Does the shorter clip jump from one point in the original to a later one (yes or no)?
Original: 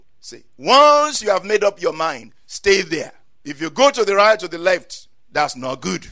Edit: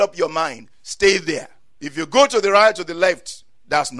no